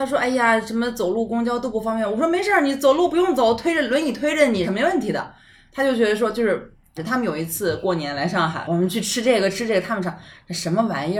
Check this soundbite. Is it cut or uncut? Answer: cut